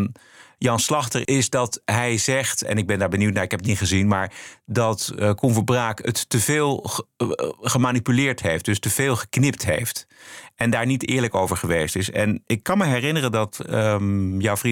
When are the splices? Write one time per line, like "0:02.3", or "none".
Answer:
none